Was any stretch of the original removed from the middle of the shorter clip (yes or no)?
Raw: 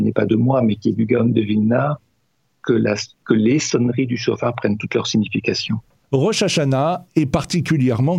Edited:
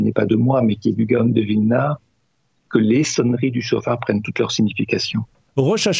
yes